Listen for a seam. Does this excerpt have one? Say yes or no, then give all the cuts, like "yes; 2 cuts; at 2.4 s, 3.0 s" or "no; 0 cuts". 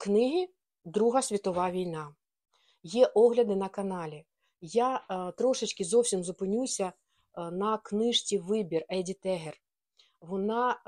no; 0 cuts